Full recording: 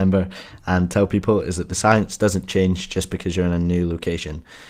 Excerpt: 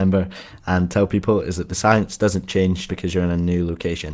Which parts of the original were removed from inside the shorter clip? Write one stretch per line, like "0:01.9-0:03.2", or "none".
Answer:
0:02.9-0:03.1

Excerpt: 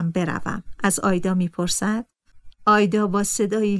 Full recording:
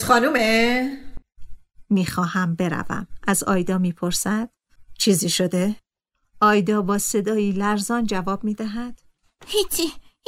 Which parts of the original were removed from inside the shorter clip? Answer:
0:04.9-0:06.3

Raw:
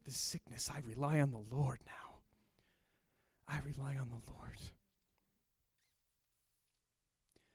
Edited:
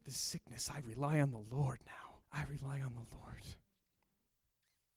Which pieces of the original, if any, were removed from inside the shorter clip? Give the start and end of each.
0:02.2-0:03.4

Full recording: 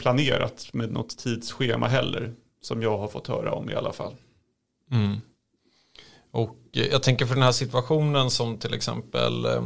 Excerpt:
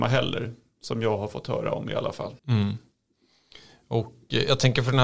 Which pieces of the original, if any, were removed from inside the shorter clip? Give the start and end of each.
0:04.2-0:04.8

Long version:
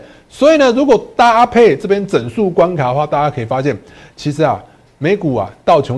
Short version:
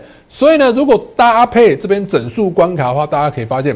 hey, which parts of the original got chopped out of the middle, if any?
none

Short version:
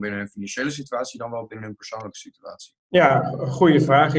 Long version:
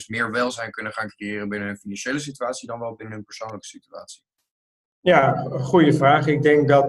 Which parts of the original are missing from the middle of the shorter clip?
0:04.3-0:04.9

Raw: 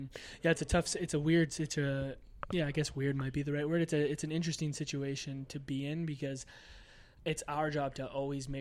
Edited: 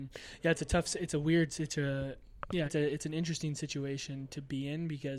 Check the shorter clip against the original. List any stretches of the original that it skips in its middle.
0:02.7-0:03.8

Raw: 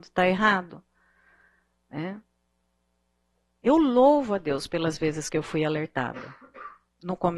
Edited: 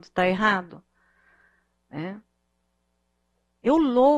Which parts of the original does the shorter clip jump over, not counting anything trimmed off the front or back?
none

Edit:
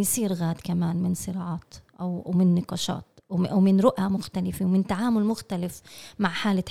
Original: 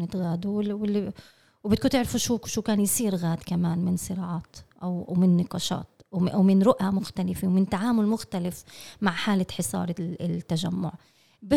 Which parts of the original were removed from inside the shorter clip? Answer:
none

